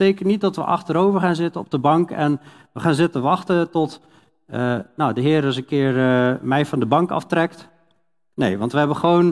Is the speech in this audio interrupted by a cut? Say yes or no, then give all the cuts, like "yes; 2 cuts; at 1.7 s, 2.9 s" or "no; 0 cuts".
no; 0 cuts